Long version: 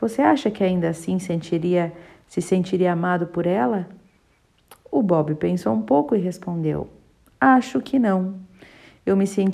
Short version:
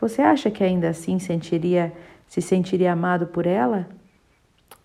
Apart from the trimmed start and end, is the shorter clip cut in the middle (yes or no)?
no